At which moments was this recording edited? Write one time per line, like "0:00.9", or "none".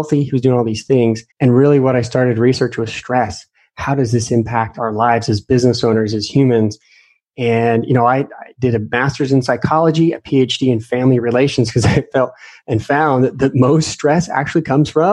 0:01.3